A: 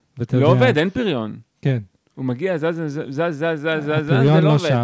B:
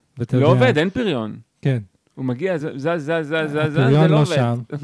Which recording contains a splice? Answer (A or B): B